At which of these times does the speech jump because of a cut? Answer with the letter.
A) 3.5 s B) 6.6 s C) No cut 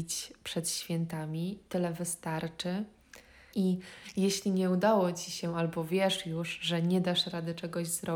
A